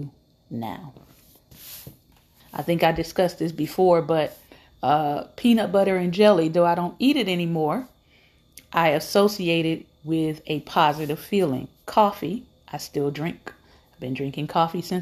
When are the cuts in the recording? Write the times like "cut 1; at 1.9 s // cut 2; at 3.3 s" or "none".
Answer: cut 1; at 2.4 s